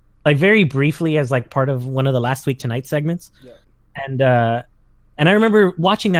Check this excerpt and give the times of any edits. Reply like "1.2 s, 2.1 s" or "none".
none

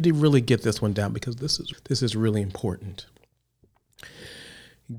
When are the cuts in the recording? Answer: 1.7 s

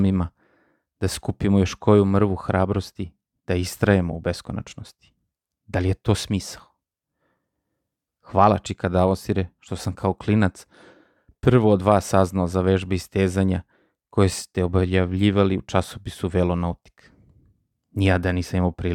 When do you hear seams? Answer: 5.5 s, 8.2 s

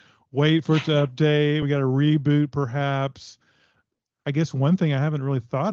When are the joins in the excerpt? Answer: none

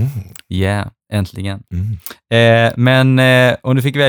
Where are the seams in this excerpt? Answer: none

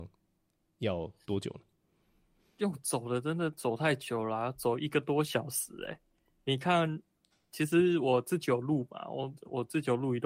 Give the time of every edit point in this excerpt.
none

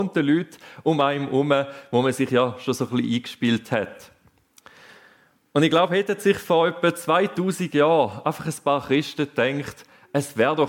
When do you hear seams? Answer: none

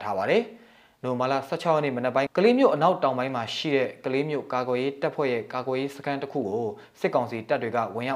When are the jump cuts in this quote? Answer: 2.3 s

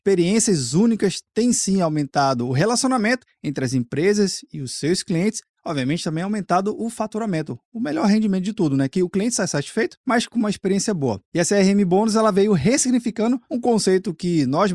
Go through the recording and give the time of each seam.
none

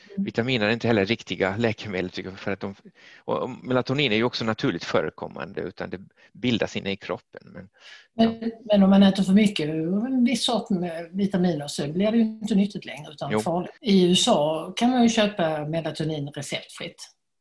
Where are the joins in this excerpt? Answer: 5.5 s, 13.8 s

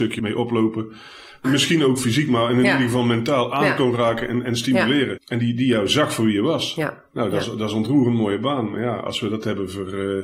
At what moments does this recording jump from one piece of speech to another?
1.4 s, 5.2 s

